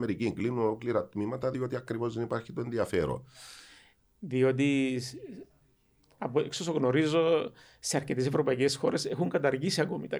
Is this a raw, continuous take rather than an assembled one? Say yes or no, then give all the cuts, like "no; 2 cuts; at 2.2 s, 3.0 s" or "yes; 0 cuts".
yes; 0 cuts